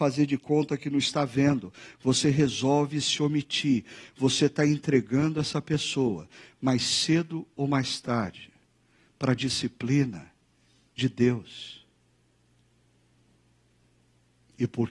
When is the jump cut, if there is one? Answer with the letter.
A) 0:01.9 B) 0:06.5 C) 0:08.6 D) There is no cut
D